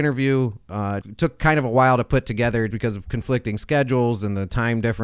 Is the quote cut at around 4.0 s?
no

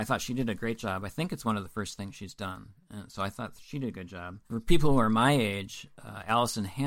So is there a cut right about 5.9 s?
no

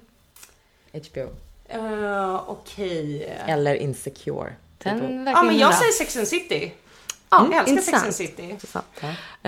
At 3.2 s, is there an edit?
no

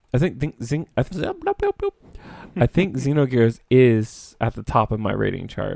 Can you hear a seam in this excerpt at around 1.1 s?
yes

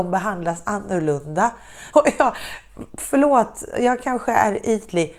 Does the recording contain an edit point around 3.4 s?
no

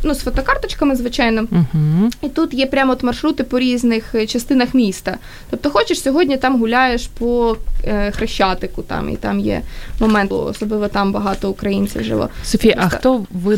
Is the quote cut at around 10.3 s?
yes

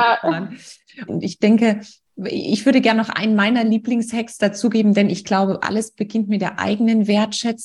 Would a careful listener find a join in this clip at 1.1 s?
yes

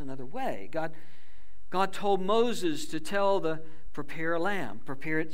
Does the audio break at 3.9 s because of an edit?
yes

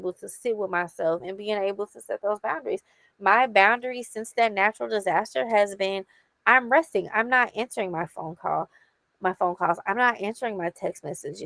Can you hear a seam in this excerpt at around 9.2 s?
no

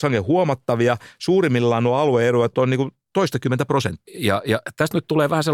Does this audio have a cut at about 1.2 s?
no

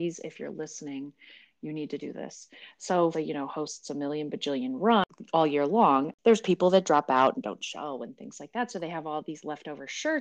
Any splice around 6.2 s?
no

